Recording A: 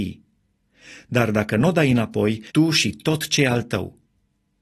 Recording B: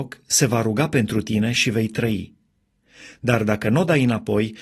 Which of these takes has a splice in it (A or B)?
A